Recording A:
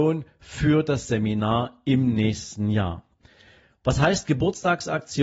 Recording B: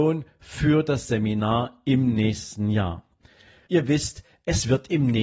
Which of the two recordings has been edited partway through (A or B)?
B